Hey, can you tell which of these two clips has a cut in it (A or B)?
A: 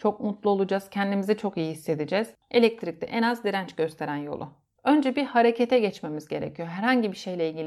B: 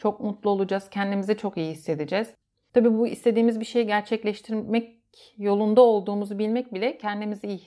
A